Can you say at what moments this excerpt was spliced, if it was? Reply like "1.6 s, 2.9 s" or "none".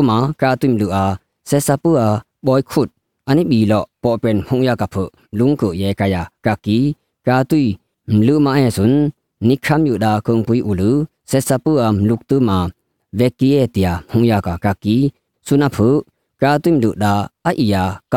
none